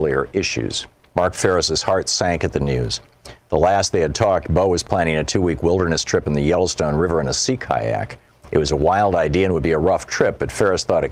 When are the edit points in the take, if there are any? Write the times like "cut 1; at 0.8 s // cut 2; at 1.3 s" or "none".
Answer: cut 1; at 1.1 s